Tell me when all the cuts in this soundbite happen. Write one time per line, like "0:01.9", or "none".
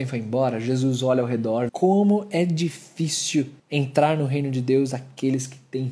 0:01.7
0:03.6